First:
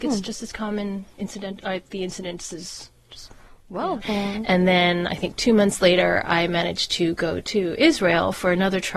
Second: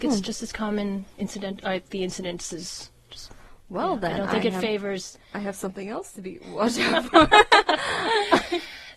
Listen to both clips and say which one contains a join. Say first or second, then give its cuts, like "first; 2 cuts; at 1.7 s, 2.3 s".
first; 1 cut; at 4.0 s